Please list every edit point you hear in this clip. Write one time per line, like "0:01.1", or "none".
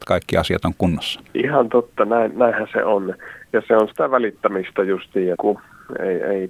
0:01.3
0:05.4

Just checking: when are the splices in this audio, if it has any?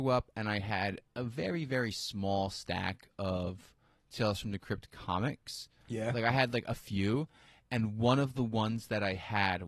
none

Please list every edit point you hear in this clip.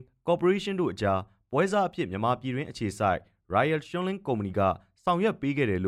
none

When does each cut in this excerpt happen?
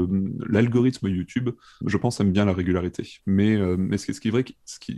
0:01.8
0:03.2

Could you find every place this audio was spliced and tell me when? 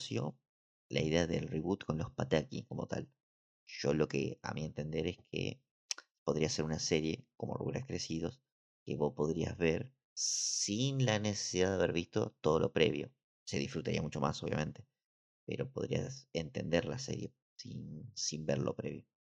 none

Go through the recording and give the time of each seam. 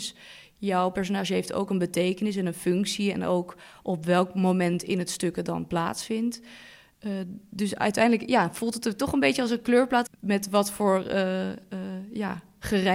0:10.1

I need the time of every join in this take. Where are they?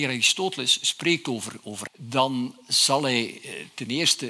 0:01.9

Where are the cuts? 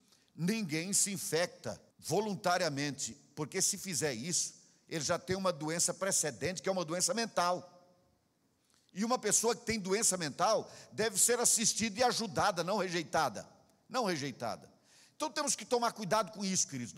0:01.9

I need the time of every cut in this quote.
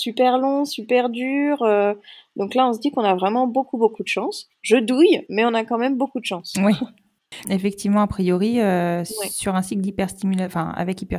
0:07.4

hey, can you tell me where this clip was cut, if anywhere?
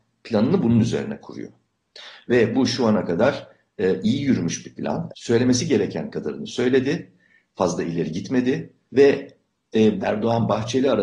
0:05.1
0:08.9
0:10.0

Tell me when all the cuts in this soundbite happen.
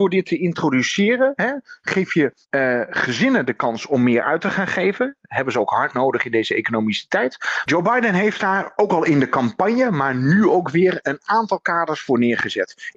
0:02.4
0:07.7

